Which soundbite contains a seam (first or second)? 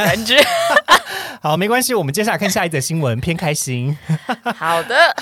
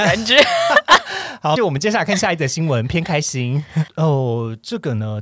second